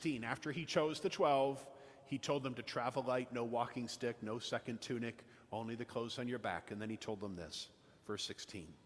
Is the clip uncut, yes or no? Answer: yes